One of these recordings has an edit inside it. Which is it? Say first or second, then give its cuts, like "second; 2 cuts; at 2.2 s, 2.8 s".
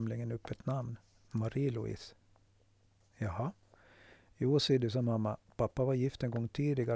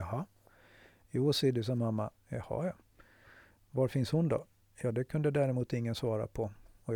second; 1 cut; at 2.2 s